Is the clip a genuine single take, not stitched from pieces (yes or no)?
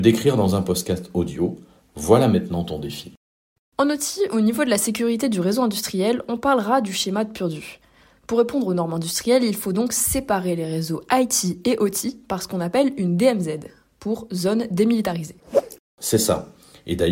no